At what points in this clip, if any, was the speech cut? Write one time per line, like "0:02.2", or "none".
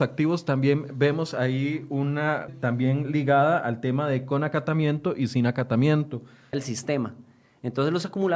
0:02.5
0:06.5